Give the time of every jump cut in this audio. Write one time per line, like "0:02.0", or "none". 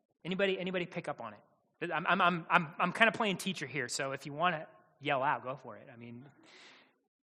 none

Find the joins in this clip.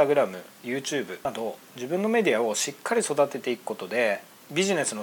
0:01.7

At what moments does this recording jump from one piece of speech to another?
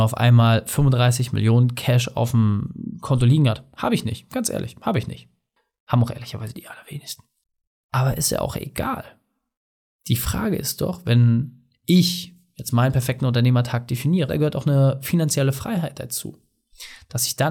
0:14.3

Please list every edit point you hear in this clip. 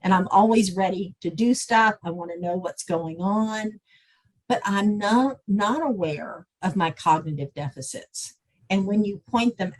none

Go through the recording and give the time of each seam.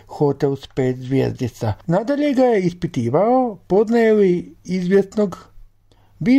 0:01.8

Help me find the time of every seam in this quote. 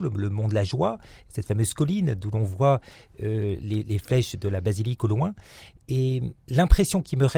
0:06.4

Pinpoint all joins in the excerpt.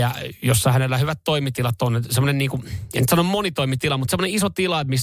none

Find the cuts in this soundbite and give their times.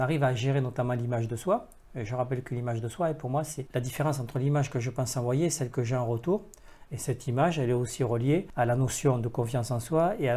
0:06.9

